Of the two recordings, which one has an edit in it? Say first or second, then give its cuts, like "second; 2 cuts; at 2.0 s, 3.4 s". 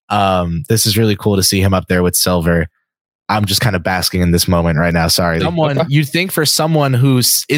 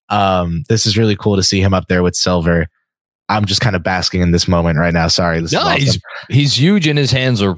first; 1 cut; at 5.4 s